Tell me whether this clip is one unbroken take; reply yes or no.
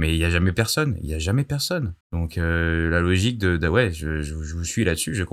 no